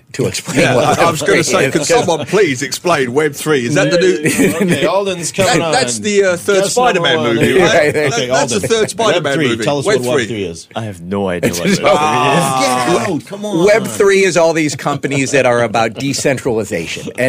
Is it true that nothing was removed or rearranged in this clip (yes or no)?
yes